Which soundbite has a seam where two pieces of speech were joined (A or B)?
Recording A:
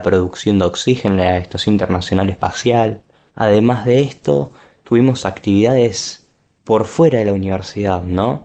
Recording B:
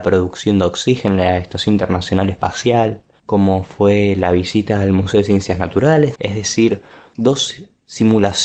B